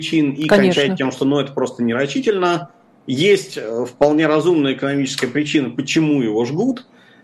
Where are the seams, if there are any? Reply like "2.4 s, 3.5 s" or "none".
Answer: none